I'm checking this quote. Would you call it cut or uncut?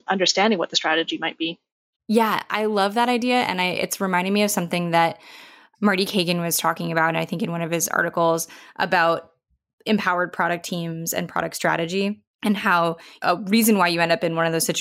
cut